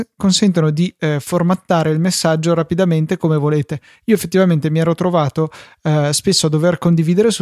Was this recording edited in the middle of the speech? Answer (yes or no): no